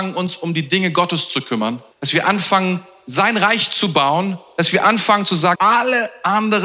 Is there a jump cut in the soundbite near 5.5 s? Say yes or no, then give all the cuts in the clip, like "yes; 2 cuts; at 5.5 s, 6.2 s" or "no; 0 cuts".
yes; 2 cuts; at 1.9 s, 5.5 s